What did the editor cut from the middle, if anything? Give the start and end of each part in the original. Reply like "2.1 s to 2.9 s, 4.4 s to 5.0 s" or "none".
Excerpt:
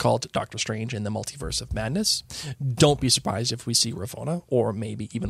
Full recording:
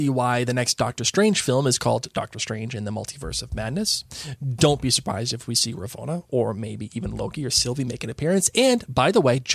none